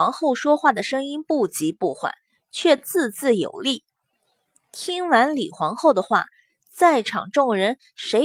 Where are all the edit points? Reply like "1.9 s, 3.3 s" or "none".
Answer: none